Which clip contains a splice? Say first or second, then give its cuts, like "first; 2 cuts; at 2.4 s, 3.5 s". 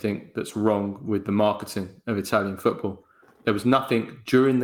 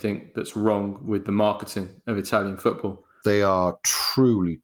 second; 1 cut; at 3.2 s